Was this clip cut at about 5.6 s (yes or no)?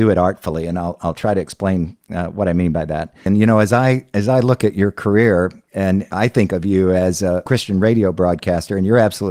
no